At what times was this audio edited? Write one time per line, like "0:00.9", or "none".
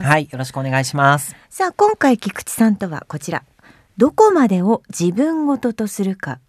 none